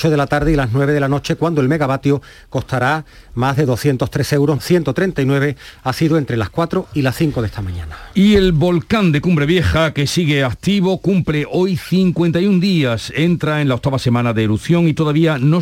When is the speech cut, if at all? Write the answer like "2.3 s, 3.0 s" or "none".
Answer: 4.6 s